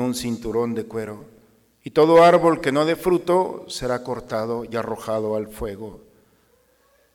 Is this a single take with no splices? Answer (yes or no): no